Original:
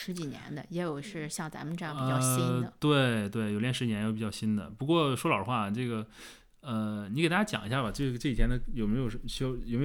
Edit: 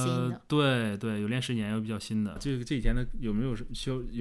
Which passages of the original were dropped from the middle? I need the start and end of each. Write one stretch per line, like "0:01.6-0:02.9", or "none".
0:04.7-0:07.9